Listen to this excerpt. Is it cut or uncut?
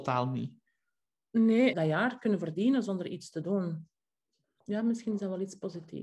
cut